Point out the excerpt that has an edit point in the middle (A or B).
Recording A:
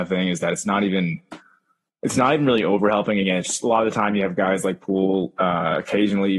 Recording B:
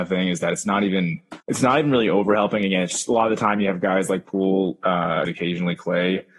B